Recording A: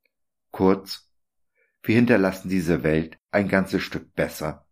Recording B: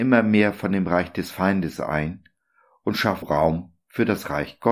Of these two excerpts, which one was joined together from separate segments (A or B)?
B